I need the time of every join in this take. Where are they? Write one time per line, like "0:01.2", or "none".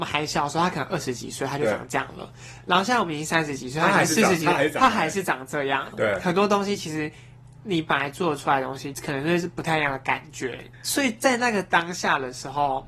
0:05.9
0:08.9
0:10.7